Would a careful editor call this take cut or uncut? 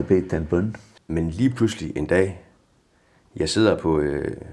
cut